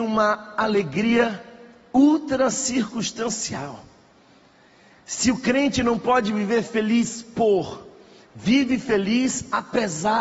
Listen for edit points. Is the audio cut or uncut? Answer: uncut